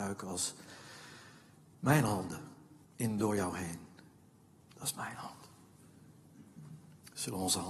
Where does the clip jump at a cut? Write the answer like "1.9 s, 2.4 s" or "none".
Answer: 2.8 s, 4.6 s